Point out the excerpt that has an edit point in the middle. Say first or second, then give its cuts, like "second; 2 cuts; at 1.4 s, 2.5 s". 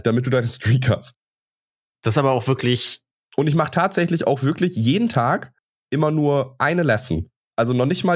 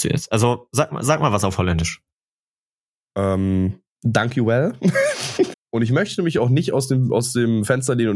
second; 1 cut; at 5.5 s